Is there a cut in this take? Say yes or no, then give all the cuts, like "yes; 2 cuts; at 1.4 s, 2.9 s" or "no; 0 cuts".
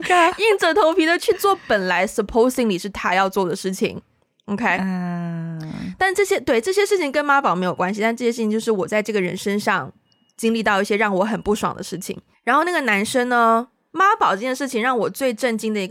yes; 2 cuts; at 12.3 s, 13.9 s